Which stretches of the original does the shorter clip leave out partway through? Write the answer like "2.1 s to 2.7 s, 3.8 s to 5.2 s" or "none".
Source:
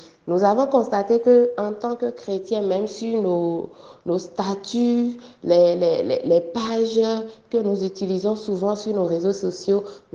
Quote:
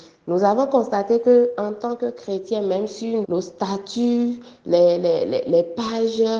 3.2 s to 4.0 s